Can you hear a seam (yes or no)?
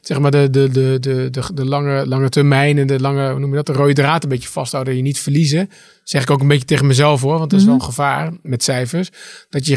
no